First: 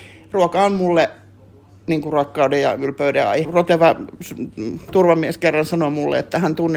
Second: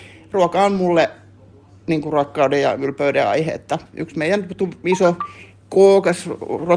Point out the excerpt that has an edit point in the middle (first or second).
first